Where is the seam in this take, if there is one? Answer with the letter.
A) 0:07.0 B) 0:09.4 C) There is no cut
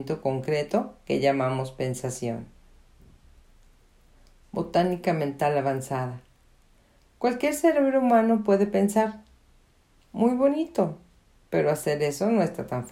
C